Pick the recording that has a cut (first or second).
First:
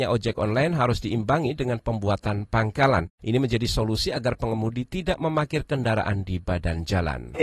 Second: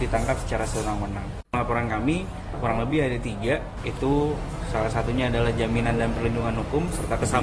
second